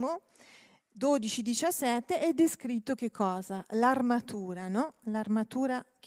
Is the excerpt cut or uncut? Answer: uncut